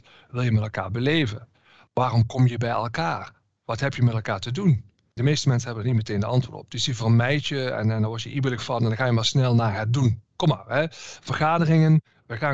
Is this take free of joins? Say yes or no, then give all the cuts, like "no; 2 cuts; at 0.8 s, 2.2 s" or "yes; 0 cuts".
no; 1 cut; at 5.1 s